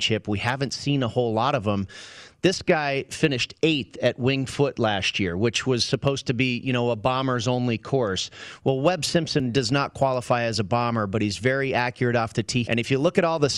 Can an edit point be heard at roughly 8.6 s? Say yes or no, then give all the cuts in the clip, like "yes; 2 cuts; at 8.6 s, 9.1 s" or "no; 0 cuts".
no; 1 cut; at 12.6 s